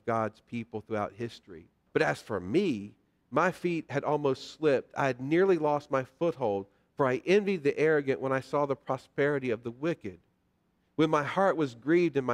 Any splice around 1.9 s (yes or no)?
yes